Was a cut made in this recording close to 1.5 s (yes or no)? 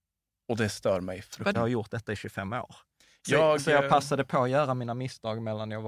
yes